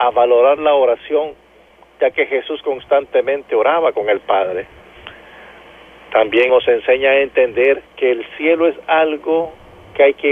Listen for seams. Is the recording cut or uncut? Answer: cut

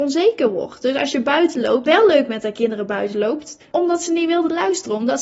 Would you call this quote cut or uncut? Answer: cut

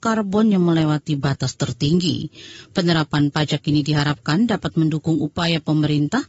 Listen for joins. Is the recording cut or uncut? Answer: uncut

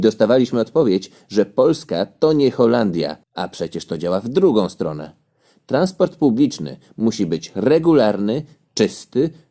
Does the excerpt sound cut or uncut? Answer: cut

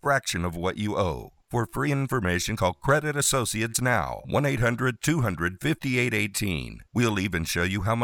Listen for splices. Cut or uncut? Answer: uncut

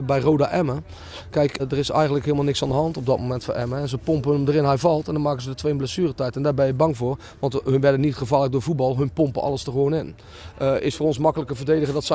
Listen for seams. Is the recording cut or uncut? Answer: cut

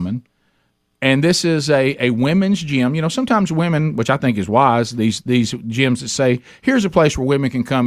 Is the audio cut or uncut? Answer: uncut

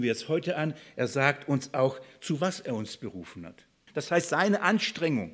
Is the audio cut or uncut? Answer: cut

